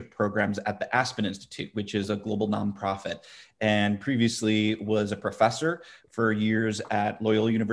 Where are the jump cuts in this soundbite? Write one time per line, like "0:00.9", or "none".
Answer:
none